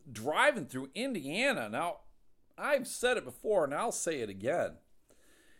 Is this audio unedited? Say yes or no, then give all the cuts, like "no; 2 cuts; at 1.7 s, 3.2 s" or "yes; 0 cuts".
yes; 0 cuts